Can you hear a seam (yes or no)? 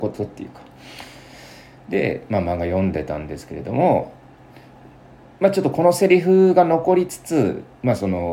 no